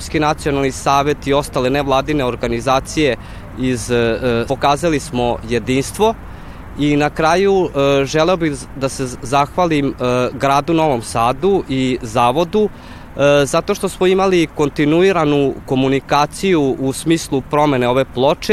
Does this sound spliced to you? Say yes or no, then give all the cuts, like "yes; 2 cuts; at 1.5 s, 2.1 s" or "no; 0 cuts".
yes; 1 cut; at 4.5 s